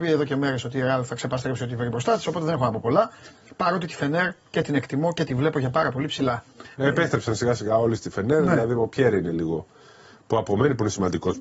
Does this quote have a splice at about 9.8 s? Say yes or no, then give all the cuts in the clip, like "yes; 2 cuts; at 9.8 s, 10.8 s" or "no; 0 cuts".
no; 1 cut; at 6.7 s